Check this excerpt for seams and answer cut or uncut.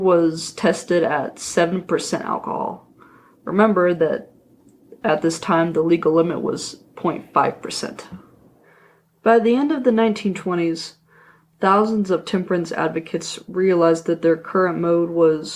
uncut